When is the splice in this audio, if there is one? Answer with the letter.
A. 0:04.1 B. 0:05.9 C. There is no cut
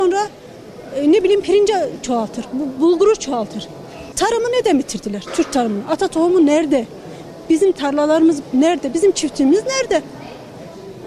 A